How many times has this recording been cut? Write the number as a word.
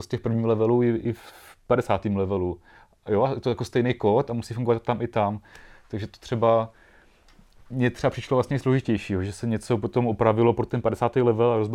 zero